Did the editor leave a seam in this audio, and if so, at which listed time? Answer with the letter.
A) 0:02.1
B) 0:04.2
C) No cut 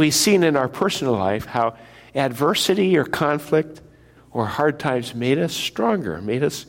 B